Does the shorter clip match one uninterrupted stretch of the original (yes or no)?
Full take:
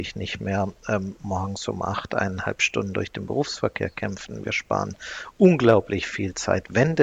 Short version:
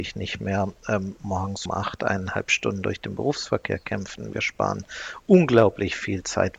no